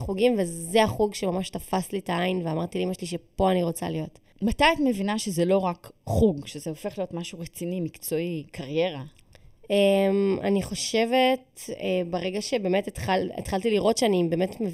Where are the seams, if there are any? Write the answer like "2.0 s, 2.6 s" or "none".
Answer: none